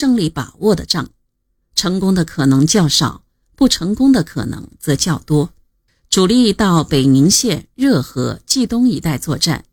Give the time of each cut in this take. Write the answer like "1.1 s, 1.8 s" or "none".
5.9 s